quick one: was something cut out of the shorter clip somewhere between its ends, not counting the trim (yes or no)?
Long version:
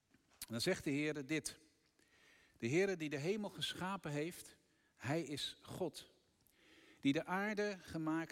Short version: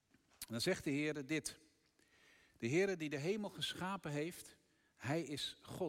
no